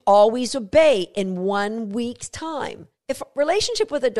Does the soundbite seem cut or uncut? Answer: cut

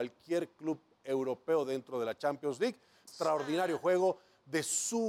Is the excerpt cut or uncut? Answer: cut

